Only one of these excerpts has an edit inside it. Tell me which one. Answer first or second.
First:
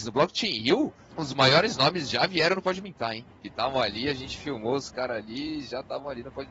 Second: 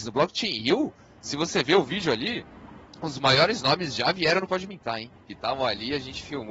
first